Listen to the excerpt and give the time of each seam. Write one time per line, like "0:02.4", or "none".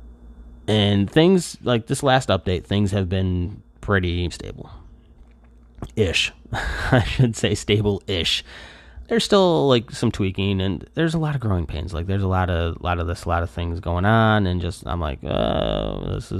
0:04.3
0:09.0